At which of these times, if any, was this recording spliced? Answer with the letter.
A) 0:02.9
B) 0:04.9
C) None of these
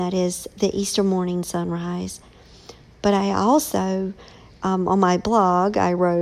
C